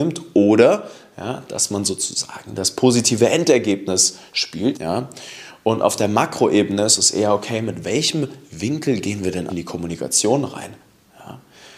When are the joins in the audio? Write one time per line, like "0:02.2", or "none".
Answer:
0:04.7
0:09.5